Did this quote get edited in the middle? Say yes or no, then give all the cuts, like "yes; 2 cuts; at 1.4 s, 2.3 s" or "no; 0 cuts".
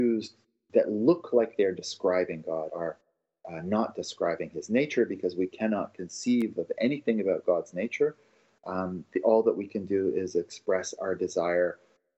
yes; 1 cut; at 2.7 s